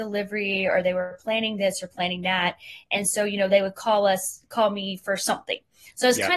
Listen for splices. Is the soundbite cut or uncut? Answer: uncut